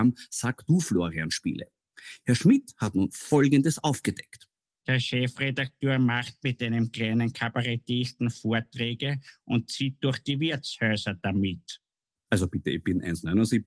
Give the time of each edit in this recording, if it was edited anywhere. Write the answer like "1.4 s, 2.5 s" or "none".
4.8 s